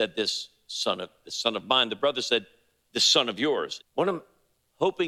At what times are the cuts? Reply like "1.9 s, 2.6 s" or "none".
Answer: 1.2 s, 3.8 s